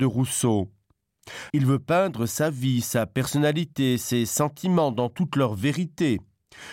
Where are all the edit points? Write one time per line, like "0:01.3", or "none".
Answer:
0:01.5